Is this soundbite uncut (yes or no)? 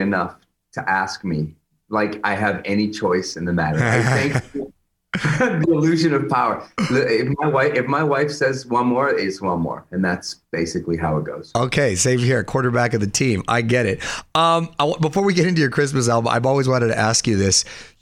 yes